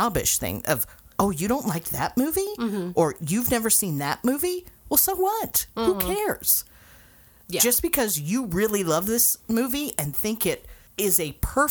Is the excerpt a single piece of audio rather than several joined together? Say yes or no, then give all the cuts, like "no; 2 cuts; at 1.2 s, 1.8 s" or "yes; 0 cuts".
yes; 0 cuts